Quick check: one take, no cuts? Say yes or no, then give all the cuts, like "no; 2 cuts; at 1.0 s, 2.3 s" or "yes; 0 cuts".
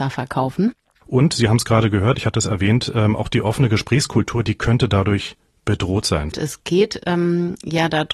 no; 2 cuts; at 1.0 s, 6.3 s